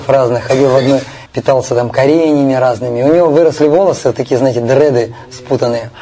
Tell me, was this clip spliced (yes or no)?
yes